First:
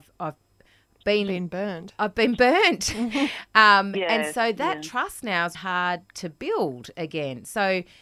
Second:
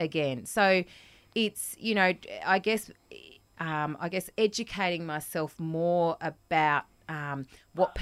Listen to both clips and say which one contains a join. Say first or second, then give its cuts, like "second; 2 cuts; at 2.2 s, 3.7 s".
first; 1 cut; at 5.5 s